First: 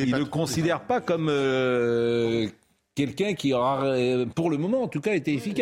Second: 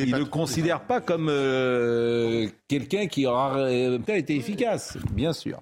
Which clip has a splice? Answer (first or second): second